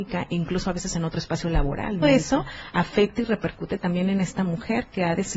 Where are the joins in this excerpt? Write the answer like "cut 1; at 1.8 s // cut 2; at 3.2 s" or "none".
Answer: cut 1; at 2.0 s